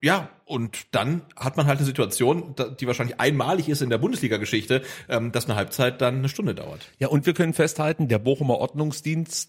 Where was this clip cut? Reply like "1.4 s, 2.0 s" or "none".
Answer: none